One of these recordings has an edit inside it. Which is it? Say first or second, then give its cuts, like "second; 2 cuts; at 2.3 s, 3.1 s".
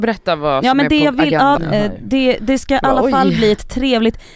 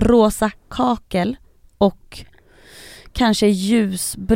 first; 1 cut; at 1.6 s